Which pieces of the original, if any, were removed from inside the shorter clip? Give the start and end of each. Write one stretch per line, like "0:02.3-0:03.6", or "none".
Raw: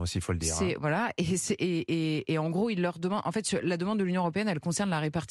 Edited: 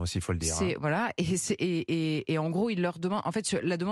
none